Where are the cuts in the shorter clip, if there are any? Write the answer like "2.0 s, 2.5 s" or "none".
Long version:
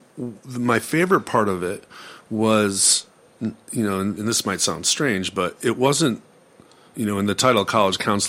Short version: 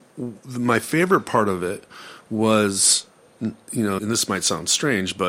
4.0 s